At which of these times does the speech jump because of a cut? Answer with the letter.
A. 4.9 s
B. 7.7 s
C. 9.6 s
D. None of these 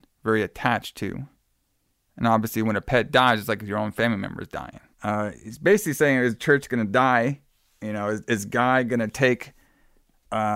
A